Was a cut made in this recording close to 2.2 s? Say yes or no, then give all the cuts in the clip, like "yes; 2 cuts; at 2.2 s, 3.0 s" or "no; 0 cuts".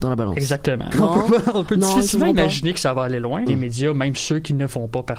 no; 2 cuts; at 0.9 s, 3.5 s